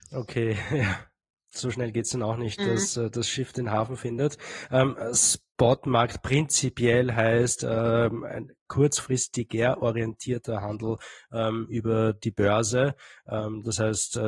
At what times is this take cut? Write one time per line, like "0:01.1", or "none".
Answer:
0:02.6